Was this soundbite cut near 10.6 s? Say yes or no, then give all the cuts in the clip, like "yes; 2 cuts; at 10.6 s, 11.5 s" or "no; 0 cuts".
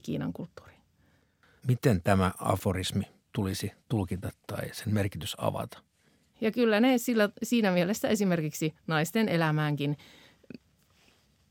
no; 2 cuts; at 1.6 s, 6.3 s